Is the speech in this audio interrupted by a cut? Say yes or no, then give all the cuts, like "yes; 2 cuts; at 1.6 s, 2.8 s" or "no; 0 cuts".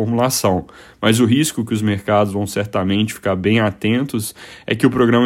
no; 0 cuts